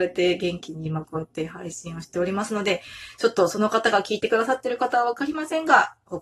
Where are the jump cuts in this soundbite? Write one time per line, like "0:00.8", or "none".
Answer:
none